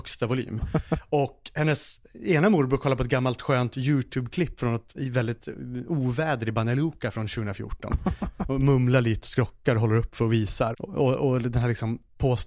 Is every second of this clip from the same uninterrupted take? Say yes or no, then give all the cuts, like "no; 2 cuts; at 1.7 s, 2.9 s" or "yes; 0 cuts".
no; 1 cut; at 10.7 s